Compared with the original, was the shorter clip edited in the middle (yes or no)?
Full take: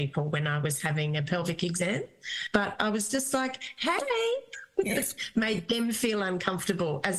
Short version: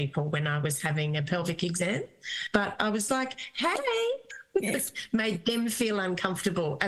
yes